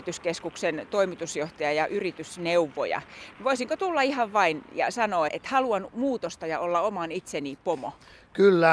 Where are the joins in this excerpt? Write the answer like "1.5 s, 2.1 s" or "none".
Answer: 5.3 s